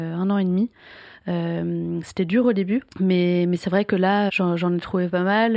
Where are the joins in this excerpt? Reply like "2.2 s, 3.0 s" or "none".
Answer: 2.9 s, 4.3 s